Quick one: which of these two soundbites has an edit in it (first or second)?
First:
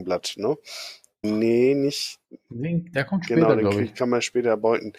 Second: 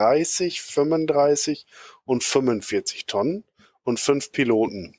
first